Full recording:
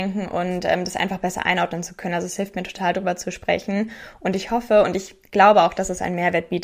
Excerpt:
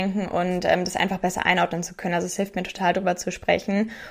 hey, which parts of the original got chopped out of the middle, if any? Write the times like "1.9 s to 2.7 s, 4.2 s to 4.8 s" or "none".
none